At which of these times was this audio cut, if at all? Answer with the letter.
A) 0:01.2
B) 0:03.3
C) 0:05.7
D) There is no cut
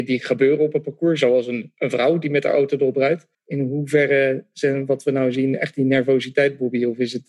B